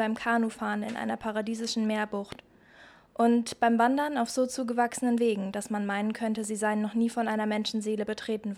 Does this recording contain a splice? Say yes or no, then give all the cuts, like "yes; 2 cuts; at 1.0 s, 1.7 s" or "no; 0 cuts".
no; 0 cuts